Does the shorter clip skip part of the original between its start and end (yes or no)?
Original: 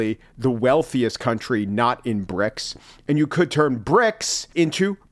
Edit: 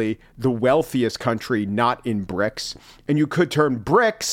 no